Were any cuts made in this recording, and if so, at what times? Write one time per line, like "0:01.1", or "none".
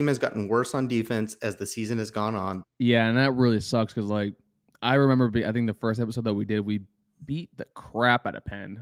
0:02.6